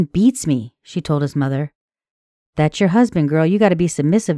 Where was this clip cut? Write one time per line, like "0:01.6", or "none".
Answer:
none